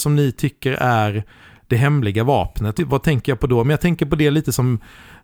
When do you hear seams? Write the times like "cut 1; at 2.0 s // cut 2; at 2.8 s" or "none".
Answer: cut 1; at 2.8 s